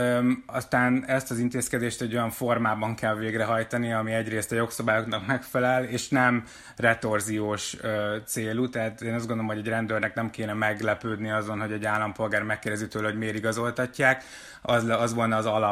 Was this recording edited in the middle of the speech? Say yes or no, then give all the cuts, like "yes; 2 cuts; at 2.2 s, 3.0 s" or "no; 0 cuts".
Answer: no; 0 cuts